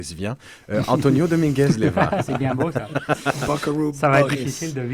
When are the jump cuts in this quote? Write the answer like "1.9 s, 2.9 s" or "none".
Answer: none